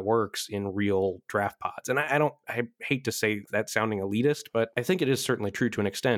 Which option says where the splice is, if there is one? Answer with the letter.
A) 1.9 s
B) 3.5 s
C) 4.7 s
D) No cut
B